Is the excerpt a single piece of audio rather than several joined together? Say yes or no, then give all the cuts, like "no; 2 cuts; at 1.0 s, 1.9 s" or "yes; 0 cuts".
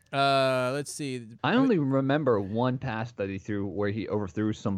no; 1 cut; at 1.4 s